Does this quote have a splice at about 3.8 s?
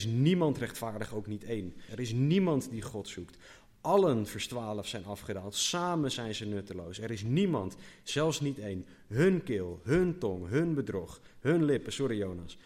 no; 1 cut; at 1.9 s

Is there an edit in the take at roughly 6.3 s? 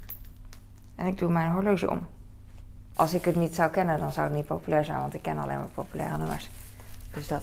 no; 1 cut; at 2.9 s

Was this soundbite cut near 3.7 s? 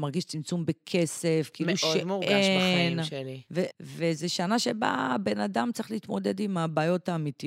yes; 1 cut; at 3.7 s

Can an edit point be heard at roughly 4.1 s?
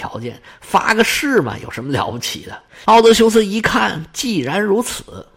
no; 1 cut; at 2.8 s

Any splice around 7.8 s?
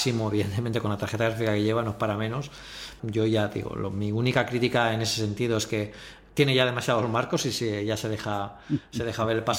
no; 1 cut; at 3.0 s

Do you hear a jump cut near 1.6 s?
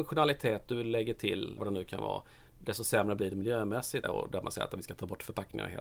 yes; 2 cuts; at 1.6 s, 4.0 s

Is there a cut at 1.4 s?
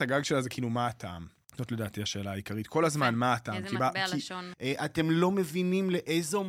yes; 2 cuts; at 1.4 s, 4.5 s

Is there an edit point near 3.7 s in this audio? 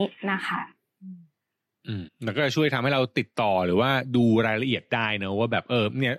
no; 1 cut; at 2.1 s

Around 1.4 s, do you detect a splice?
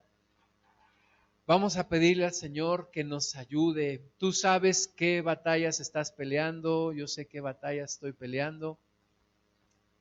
no; 1 cut; at 4.1 s

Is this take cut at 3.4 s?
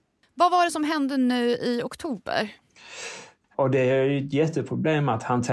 yes; 1 cut; at 3.4 s

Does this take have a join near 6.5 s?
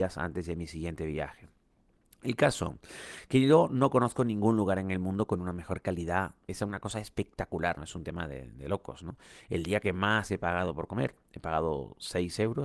yes; 2 cuts; at 6.5 s, 7.8 s

